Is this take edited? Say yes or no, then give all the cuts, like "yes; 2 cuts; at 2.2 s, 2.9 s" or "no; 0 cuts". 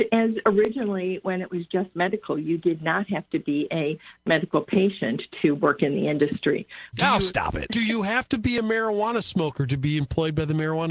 yes; 1 cut; at 6.9 s